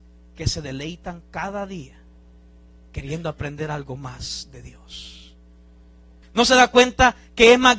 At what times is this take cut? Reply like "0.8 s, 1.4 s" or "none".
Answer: 6.2 s